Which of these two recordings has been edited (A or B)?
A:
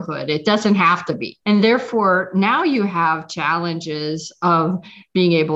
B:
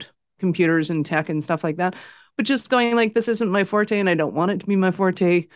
A